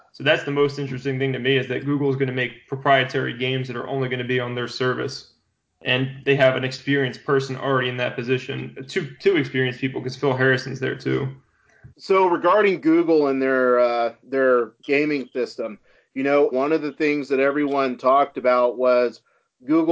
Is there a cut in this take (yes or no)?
yes